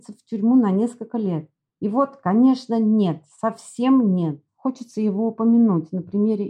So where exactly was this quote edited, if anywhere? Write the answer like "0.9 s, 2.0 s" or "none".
4.5 s